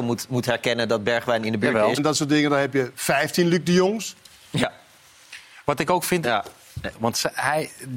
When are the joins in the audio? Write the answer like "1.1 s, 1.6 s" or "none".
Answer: 2.0 s, 6.9 s